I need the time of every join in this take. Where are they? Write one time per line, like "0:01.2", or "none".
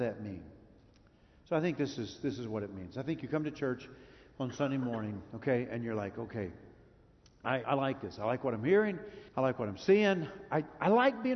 0:07.6
0:09.3